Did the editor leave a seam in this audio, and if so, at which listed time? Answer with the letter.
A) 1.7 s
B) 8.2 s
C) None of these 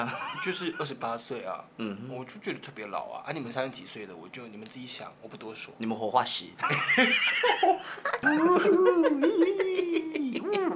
B